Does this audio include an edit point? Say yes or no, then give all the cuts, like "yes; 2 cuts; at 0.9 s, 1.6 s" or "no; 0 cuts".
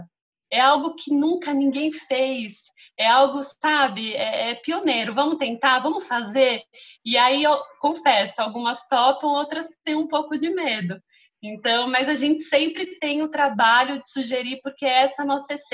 no; 0 cuts